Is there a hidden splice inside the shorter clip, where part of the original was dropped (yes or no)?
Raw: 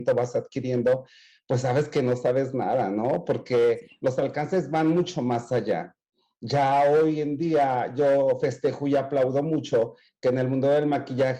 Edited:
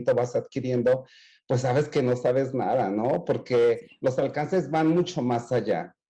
no